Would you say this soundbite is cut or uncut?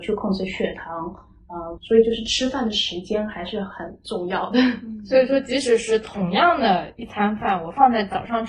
cut